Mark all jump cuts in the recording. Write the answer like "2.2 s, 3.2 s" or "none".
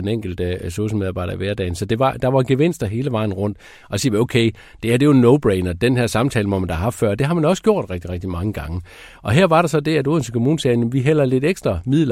none